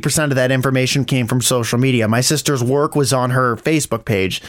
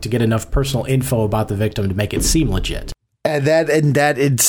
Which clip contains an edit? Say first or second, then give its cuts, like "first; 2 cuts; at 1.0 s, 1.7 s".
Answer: first; 1 cut; at 1.1 s